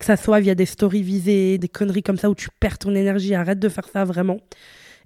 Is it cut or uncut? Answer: cut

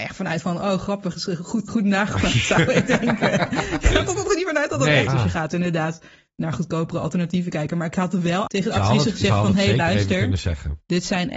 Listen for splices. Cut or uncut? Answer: cut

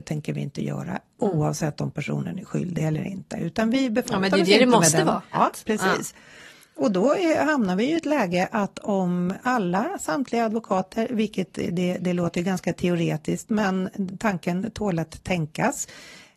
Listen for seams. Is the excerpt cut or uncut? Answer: cut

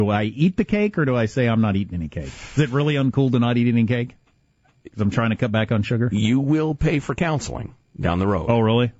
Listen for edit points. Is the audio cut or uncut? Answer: uncut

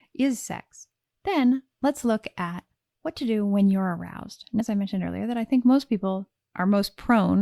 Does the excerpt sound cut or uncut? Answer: cut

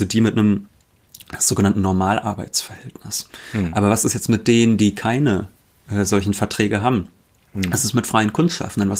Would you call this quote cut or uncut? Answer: uncut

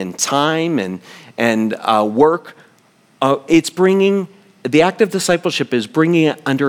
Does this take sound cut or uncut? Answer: uncut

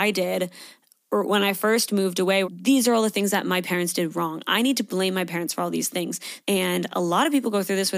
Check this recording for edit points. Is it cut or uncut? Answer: cut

